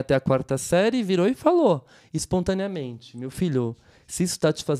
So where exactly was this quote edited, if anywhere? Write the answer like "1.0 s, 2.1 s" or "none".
none